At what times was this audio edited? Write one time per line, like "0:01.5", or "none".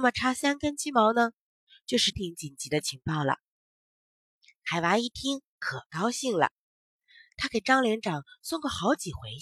0:02.1
0:03.9